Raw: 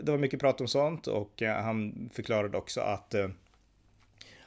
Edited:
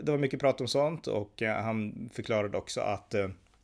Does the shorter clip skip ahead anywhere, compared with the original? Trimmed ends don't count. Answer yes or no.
no